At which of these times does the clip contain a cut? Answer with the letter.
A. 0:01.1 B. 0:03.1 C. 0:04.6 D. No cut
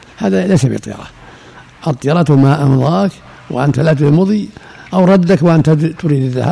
D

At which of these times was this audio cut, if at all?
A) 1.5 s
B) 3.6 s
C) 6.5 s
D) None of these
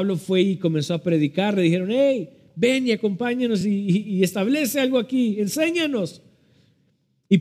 D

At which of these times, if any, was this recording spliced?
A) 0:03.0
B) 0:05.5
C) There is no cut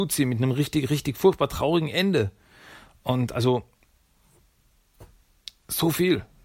C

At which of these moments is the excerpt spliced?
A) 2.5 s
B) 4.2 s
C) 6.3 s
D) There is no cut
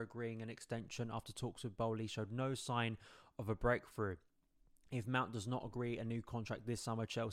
D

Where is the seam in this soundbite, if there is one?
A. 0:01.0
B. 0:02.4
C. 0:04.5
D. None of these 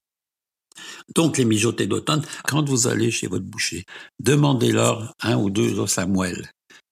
B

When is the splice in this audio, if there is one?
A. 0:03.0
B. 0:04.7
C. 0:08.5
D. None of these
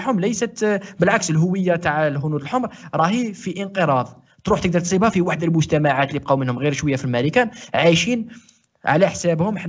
D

